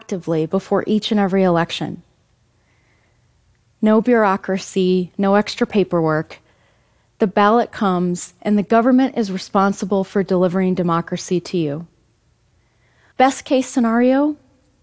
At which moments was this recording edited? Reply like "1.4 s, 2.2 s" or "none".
13.1 s